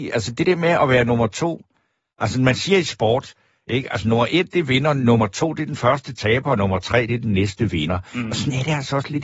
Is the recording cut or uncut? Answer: uncut